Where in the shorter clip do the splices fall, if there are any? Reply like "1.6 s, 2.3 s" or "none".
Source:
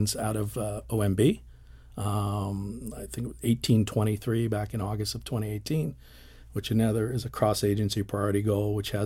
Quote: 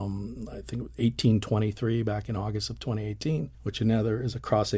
3.5 s